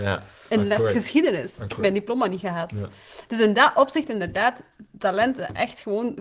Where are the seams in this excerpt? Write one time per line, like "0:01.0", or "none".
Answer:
none